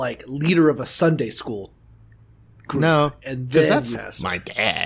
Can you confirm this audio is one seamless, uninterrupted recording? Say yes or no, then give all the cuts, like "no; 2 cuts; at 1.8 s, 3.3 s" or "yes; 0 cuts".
no; 1 cut; at 3.9 s